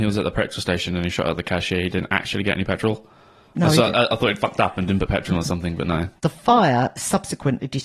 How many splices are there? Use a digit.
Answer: 1